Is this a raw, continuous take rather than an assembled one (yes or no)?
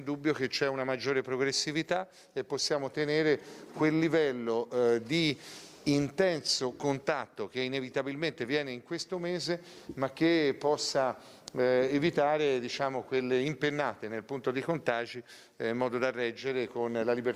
yes